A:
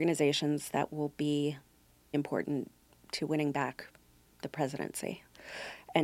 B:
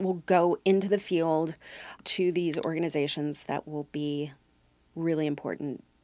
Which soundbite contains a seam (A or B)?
A